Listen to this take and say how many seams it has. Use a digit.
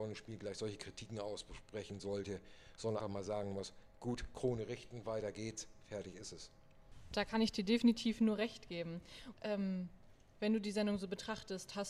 2